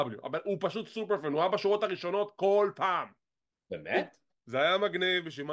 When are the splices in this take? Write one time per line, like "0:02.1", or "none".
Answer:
0:04.4